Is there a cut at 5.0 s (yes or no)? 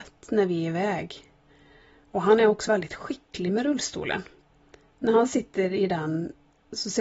no